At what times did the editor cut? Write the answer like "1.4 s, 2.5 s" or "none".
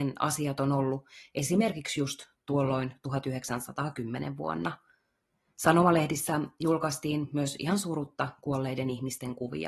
none